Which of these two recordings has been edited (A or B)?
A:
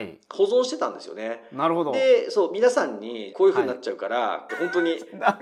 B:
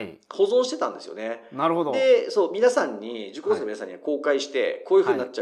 A